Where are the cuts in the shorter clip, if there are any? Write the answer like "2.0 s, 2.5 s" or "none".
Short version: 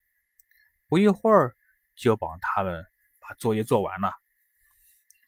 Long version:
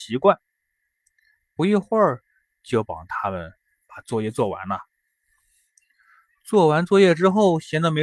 none